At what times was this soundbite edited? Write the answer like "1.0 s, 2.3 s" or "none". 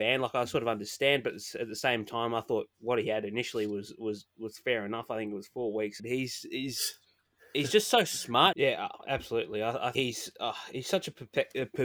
6.0 s, 8.5 s, 9.9 s